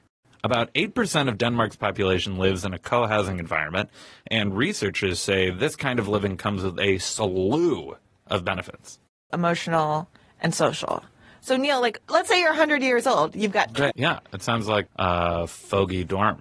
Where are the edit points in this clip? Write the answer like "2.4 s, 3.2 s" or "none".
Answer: 9.3 s, 13.9 s